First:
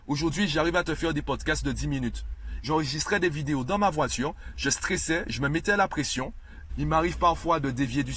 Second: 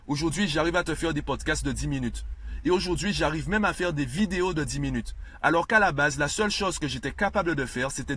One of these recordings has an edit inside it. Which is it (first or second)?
first